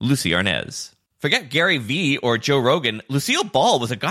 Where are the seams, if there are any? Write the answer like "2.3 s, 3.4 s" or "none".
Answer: 1.1 s